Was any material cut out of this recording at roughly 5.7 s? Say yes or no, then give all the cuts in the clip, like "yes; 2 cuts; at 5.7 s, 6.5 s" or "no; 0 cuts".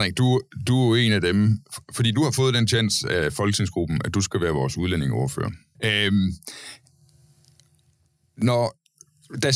yes; 1 cut; at 5.7 s